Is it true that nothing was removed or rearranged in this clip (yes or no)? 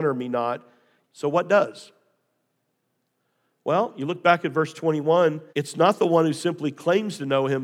no